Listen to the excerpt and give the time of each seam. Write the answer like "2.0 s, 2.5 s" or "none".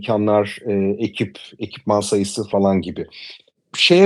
none